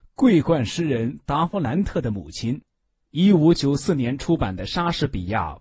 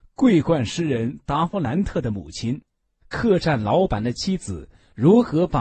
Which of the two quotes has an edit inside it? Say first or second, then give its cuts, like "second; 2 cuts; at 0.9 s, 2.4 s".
second; 1 cut; at 3.0 s